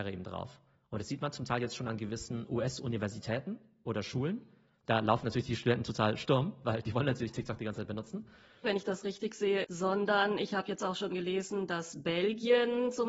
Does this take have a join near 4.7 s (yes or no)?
no